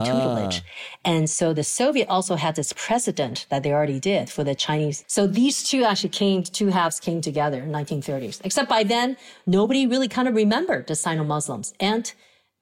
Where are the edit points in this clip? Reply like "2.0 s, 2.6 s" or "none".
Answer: 5.0 s